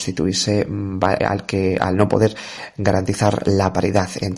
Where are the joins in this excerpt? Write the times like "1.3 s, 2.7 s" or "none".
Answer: 1.2 s